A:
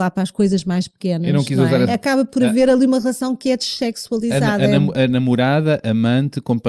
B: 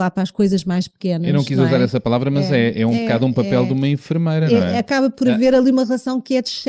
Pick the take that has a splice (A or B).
A